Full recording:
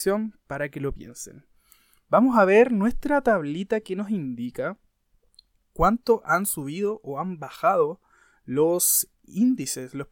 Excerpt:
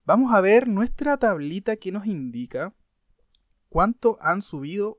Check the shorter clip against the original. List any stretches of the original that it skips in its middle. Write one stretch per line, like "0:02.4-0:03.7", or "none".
none